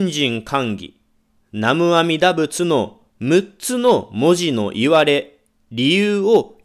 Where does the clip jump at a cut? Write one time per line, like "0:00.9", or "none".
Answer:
0:01.3
0:03.1